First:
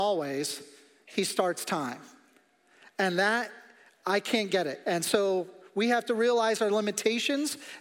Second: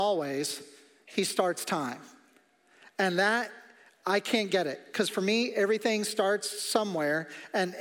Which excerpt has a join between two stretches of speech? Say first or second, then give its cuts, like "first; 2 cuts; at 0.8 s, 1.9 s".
first; 1 cut; at 4.8 s